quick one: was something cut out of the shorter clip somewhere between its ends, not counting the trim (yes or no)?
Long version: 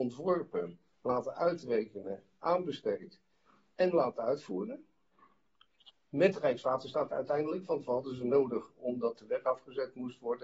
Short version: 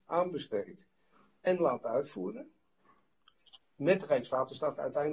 no